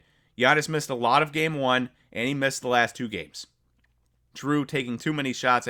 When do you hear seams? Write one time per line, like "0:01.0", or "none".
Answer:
0:04.3